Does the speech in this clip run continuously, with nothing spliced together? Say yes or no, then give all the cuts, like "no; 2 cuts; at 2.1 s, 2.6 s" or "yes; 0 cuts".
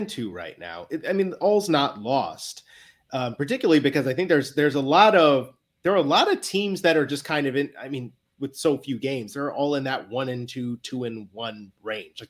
yes; 0 cuts